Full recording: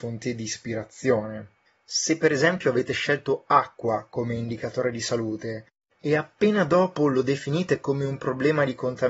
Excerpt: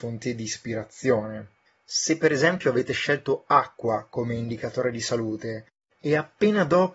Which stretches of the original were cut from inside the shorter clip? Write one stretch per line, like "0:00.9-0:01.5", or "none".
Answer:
none